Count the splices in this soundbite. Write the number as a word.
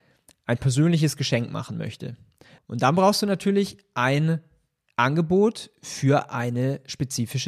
one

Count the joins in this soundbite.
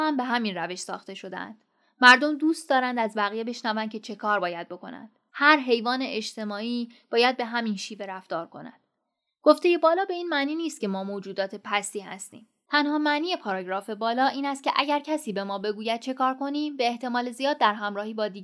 one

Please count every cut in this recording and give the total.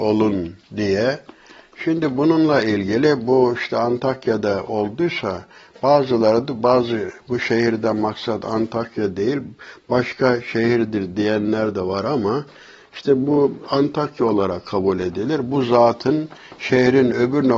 zero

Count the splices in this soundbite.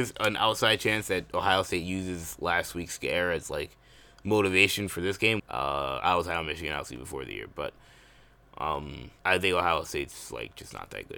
two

